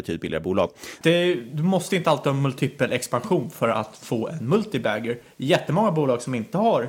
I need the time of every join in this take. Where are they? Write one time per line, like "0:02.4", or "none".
0:01.0